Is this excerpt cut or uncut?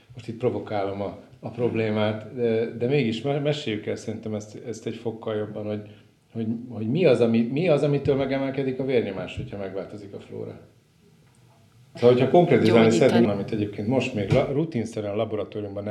cut